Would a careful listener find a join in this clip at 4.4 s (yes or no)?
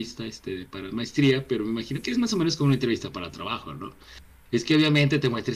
no